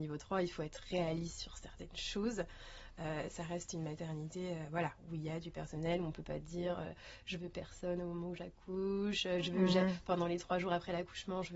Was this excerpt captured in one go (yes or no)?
yes